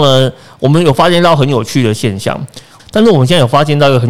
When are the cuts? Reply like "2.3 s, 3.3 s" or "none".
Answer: 2.8 s